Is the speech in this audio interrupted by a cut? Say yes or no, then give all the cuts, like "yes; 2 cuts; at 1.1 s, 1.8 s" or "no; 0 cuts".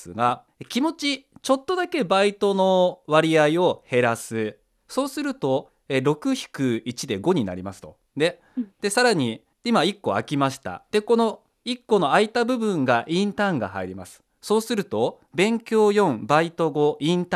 no; 0 cuts